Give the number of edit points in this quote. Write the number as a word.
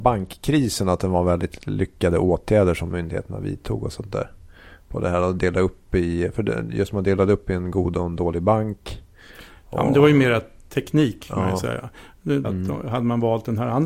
one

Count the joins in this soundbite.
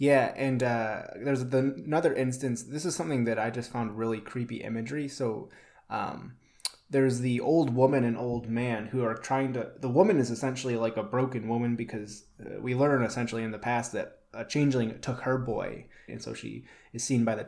one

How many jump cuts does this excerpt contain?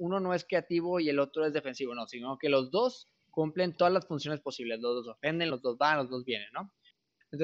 one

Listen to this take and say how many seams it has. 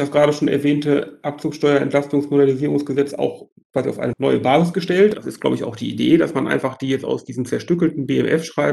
one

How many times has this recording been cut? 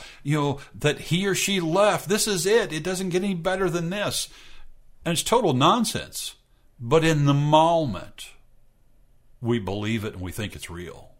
zero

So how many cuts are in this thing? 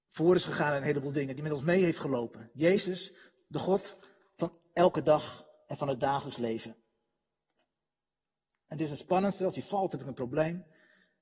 zero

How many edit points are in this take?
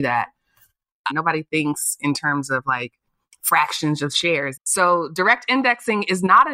two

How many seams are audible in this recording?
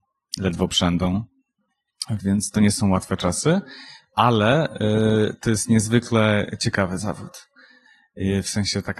one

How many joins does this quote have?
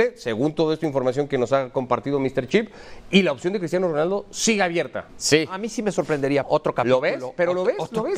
two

